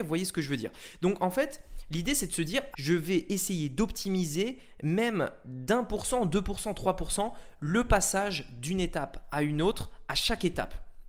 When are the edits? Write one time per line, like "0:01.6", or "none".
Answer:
0:02.7